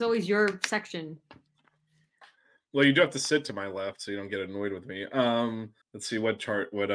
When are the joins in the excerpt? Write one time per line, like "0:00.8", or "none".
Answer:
0:05.8